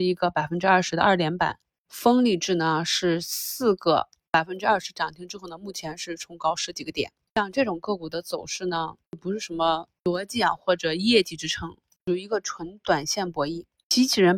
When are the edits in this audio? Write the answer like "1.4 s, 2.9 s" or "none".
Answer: 7.3 s, 12.0 s